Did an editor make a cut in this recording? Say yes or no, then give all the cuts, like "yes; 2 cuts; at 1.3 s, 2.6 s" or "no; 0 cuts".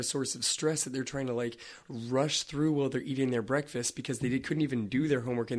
no; 0 cuts